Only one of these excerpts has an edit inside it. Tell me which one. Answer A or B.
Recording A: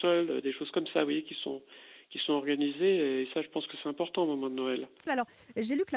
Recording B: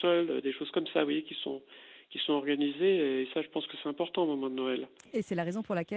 A